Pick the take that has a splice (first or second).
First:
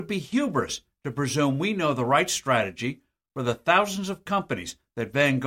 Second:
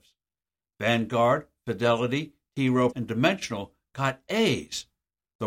second